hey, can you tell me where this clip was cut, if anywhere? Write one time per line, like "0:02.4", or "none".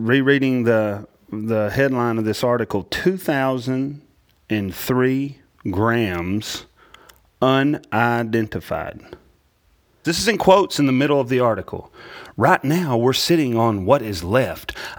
0:10.0